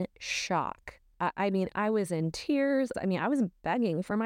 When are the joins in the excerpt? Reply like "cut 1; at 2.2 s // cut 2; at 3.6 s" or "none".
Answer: cut 1; at 2.9 s